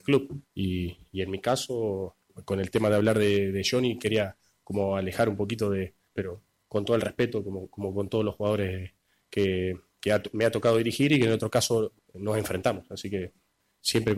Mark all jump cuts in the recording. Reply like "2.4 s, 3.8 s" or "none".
6.2 s